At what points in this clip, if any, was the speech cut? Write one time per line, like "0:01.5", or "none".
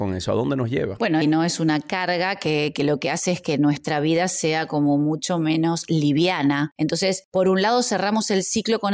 0:01.2